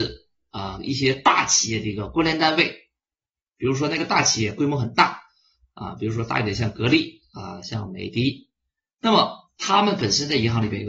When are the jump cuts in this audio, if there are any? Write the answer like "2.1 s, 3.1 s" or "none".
none